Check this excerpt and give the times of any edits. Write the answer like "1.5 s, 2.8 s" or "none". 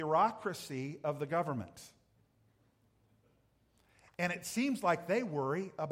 none